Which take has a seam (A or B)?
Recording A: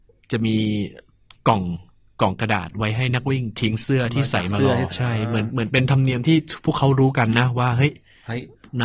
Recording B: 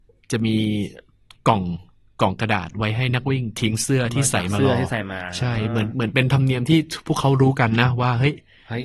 A